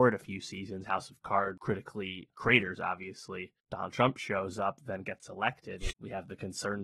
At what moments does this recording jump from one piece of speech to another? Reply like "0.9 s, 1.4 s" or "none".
5.9 s

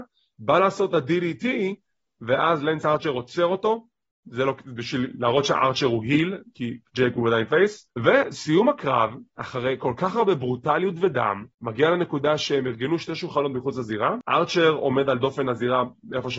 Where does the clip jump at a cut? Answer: none

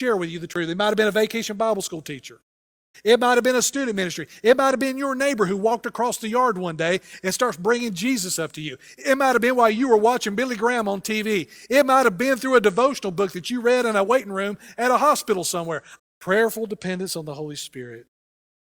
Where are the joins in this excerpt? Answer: 2.9 s, 16.0 s

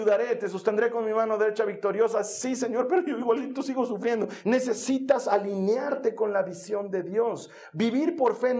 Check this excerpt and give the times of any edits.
4.4 s

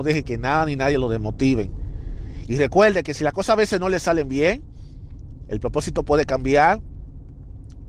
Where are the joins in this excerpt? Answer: 2.4 s

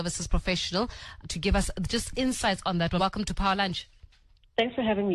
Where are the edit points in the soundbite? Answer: 1.2 s, 3.0 s

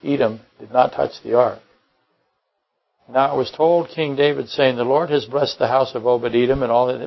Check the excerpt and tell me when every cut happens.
3.0 s

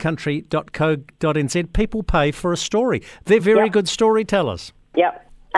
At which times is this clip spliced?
none

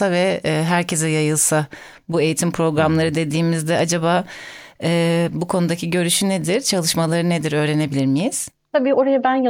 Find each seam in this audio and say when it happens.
5.3 s

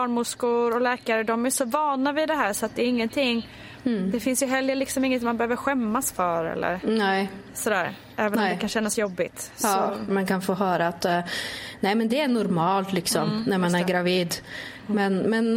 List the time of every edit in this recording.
10.1 s

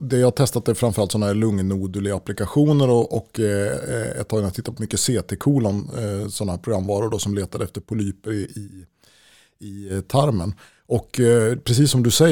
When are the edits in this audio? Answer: none

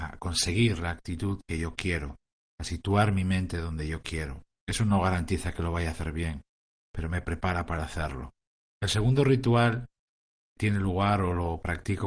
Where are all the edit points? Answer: 10.6 s

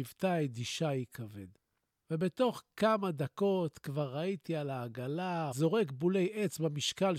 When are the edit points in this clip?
5.5 s

